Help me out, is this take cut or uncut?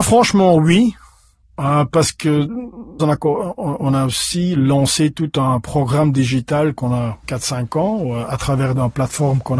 cut